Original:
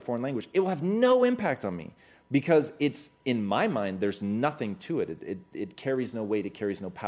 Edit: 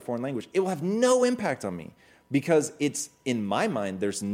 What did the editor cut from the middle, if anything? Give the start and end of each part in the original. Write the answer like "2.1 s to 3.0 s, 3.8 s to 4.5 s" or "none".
none